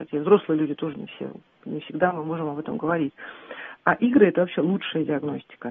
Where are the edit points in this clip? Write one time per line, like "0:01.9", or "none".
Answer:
none